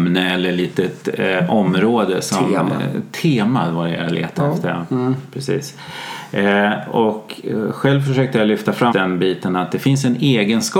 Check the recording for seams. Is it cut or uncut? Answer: cut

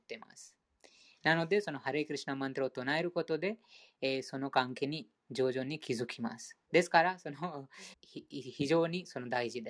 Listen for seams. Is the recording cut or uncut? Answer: cut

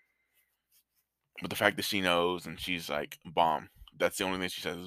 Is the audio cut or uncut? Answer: uncut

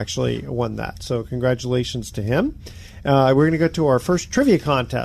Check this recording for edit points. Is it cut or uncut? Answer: uncut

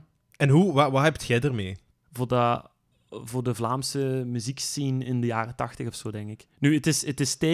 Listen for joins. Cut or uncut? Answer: cut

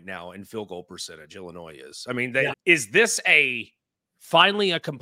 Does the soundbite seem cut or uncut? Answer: cut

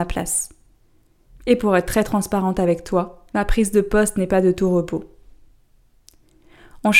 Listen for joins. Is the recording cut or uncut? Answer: cut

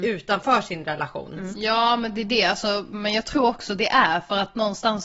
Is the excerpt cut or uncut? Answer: cut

